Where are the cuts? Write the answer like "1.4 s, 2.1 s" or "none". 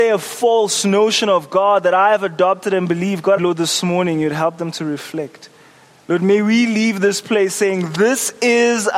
3.4 s

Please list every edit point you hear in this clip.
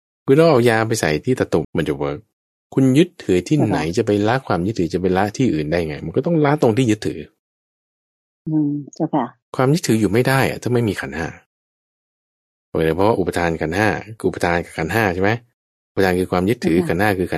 1.6 s

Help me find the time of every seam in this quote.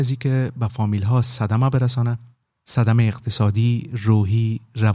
none

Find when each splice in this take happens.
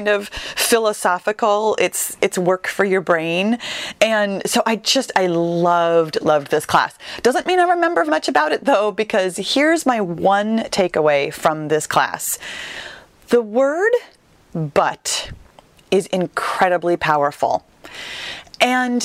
6.2 s, 8.1 s

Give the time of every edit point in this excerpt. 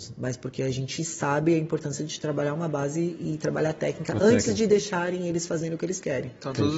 none

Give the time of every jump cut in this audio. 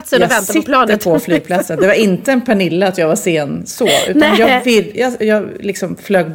5.2 s

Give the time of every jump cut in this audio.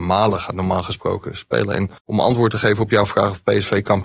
2.0 s

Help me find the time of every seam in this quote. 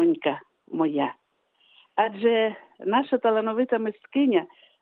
none

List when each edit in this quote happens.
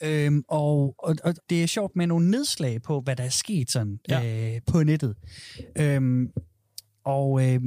1.4 s

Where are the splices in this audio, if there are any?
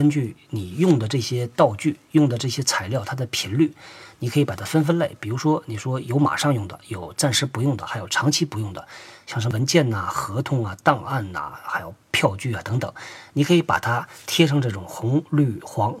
none

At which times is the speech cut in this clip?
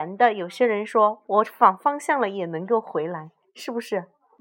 none

